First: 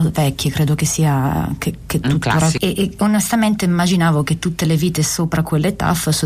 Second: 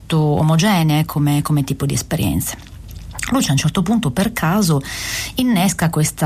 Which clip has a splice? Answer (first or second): first